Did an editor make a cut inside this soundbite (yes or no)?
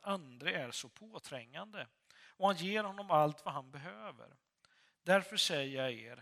no